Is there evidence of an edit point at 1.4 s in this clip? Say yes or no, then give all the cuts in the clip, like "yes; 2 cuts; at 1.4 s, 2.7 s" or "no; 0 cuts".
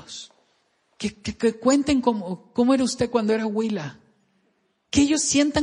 no; 0 cuts